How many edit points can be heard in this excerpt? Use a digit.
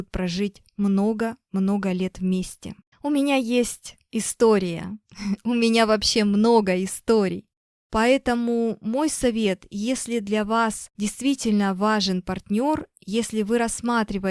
1